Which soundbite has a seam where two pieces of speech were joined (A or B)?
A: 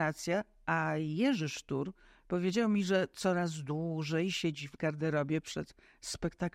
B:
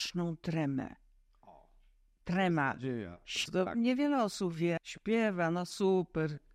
B